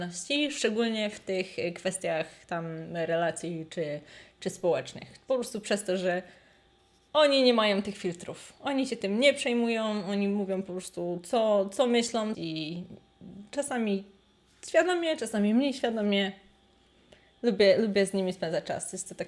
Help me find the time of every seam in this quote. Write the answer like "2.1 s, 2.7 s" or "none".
12.3 s